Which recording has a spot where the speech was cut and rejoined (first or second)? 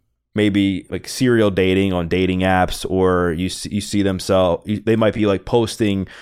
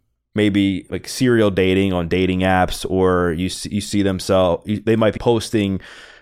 second